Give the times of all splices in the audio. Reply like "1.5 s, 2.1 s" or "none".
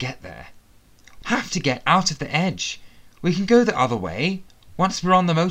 1.2 s